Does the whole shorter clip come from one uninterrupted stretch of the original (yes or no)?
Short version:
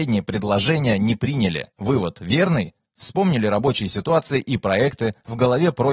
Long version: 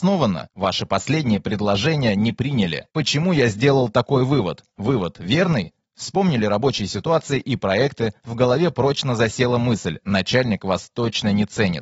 no